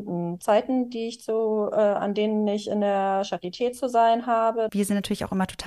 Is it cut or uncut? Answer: cut